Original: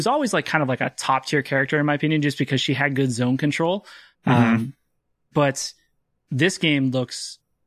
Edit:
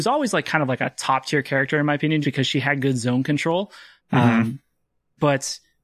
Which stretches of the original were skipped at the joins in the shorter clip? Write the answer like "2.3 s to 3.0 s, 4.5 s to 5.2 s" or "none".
2.2 s to 2.3 s